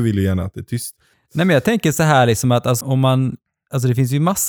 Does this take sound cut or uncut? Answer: cut